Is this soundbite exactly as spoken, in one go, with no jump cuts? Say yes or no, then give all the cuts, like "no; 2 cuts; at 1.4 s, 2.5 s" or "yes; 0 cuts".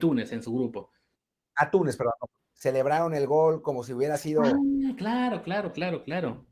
no; 1 cut; at 2.5 s